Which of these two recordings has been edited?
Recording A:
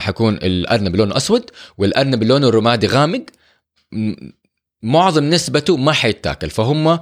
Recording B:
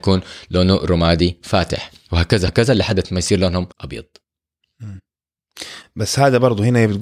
B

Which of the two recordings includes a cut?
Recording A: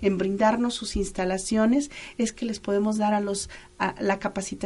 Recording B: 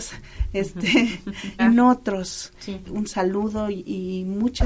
B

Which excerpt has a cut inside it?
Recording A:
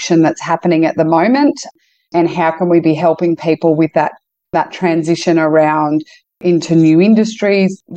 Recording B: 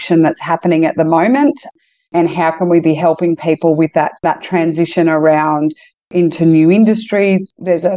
B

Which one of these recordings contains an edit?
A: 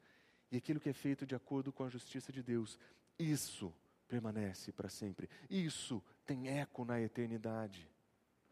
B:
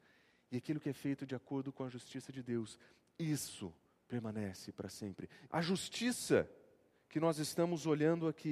B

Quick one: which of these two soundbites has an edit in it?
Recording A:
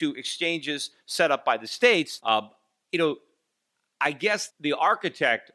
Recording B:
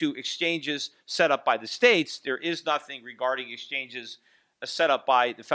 A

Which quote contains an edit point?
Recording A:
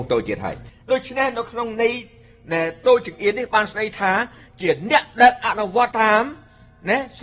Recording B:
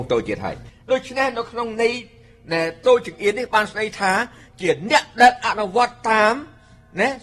A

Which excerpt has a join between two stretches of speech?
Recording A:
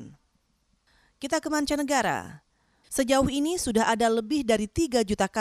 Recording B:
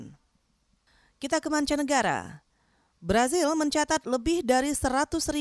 A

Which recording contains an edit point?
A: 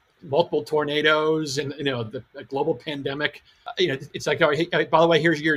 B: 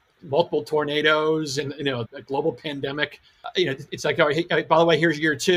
B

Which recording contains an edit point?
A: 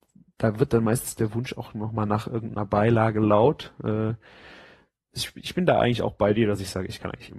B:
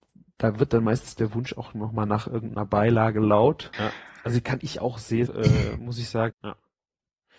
B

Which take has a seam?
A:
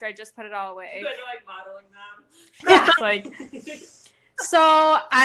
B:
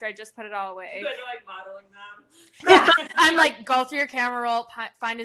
A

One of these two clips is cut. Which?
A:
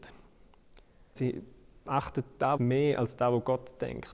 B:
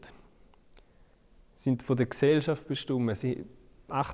A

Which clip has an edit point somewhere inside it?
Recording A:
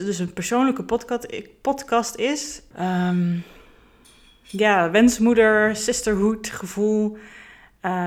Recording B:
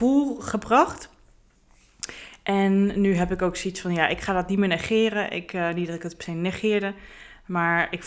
A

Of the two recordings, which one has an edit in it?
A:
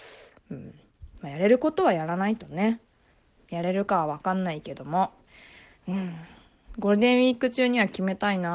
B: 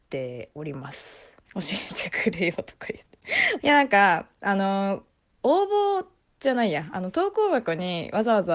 B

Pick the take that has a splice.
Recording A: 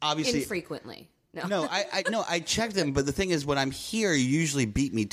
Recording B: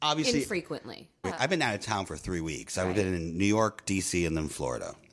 B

